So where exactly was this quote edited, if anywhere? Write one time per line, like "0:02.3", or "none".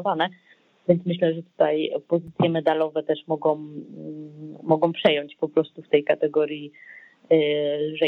none

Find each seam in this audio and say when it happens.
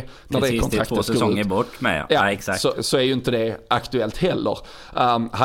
0:02.7

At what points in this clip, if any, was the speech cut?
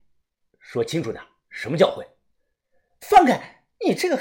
none

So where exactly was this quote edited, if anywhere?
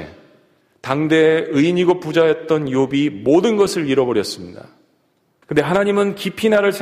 0:05.4

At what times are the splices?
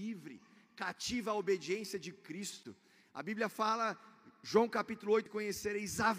0:05.3

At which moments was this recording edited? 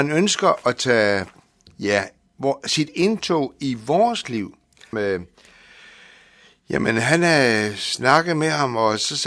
0:04.9

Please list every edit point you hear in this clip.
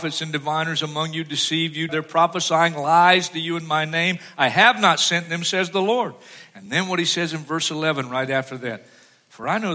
0:01.9

